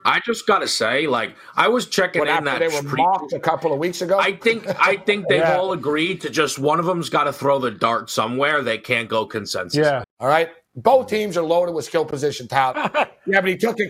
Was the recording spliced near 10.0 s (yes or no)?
yes